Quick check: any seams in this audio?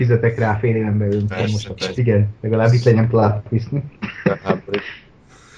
yes; 1 cut; at 2.0 s

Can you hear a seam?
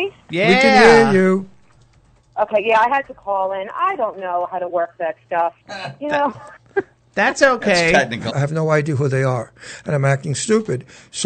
yes; 2 cuts; at 5.6 s, 8.3 s

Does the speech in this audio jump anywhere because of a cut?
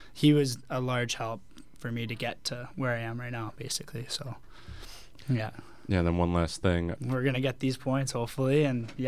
yes; 1 cut; at 6.9 s

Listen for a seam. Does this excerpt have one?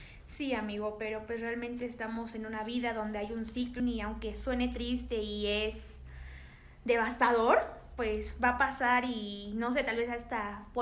yes; 1 cut; at 3.8 s

